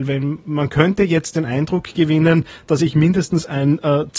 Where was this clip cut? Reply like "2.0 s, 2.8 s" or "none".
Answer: none